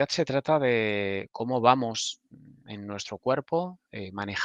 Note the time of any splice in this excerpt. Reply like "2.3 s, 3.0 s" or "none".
none